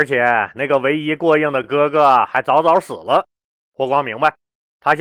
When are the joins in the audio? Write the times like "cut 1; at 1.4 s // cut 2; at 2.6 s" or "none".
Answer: none